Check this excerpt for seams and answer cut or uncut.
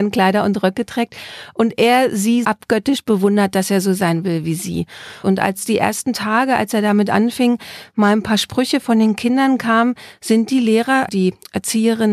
cut